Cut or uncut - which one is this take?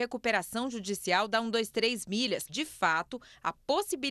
cut